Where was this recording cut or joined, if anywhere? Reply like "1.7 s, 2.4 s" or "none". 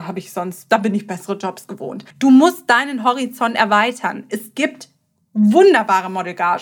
2.1 s